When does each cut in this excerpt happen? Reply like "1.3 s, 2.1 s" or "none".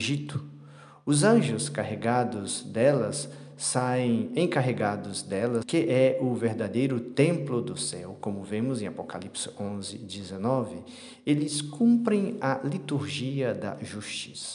5.6 s